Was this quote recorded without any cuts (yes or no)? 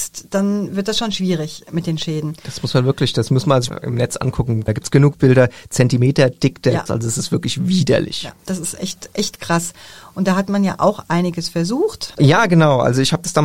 no